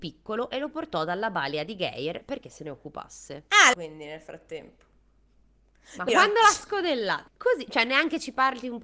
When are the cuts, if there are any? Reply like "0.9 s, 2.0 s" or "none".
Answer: 3.7 s, 6.1 s, 7.3 s